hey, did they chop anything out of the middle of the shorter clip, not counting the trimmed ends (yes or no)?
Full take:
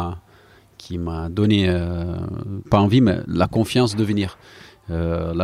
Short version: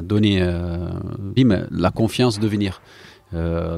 yes